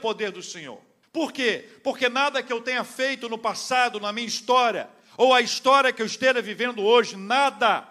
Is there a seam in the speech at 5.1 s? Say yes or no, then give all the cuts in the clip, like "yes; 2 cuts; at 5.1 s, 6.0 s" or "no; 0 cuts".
no; 1 cut; at 1.0 s